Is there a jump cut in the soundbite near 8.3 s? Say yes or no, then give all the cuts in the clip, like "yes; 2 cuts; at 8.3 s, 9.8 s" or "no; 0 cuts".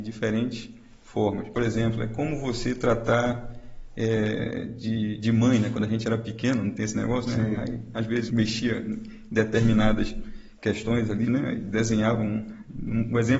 yes; 3 cuts; at 1.5 s, 8.3 s, 11.2 s